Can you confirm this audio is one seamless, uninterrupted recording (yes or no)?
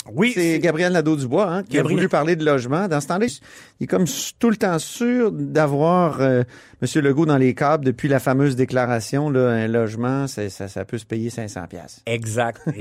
no